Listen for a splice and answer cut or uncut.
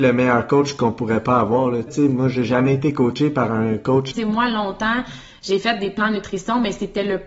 cut